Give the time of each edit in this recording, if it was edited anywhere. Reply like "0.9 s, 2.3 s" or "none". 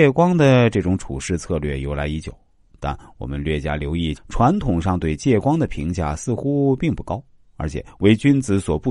4.1 s